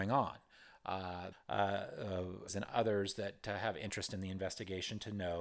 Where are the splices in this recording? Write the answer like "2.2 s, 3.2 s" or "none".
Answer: 1.3 s, 2.5 s